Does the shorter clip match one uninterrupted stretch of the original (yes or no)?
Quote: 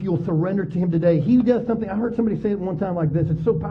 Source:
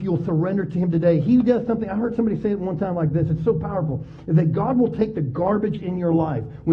yes